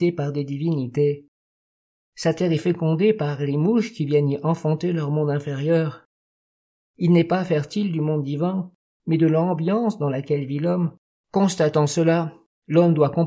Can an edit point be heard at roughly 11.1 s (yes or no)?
yes